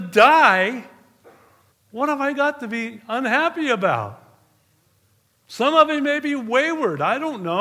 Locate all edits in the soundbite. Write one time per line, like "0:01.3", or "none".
0:01.7
0:05.4